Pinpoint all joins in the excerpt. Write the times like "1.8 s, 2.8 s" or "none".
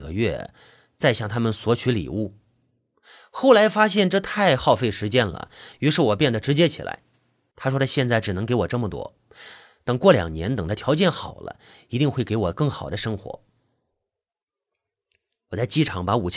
7.5 s